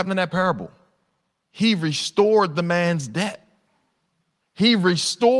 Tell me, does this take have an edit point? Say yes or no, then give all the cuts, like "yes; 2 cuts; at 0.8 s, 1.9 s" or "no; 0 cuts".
yes; 1 cut; at 4.4 s